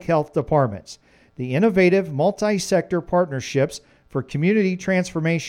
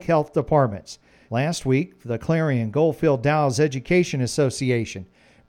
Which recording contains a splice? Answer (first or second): second